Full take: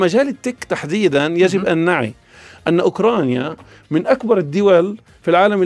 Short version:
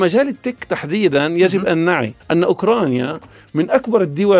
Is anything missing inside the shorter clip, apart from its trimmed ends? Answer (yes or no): yes